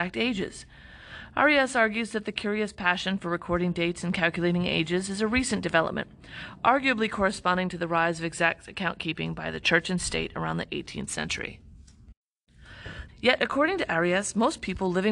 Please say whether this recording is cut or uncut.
cut